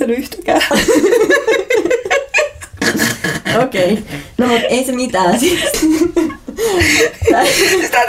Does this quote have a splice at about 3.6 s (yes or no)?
no